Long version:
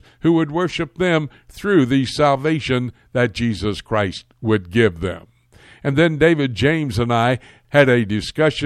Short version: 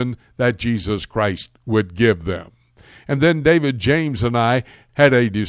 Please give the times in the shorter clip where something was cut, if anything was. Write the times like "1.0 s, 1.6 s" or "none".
none